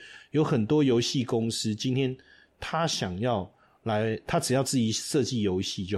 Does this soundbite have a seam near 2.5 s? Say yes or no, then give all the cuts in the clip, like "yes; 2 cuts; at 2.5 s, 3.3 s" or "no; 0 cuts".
no; 0 cuts